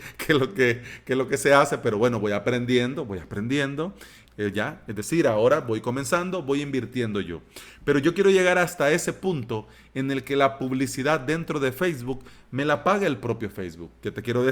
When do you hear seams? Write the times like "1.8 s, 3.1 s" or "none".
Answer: 4.3 s